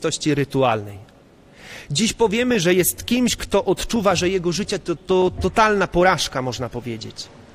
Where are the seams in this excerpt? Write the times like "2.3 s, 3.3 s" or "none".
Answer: 5.0 s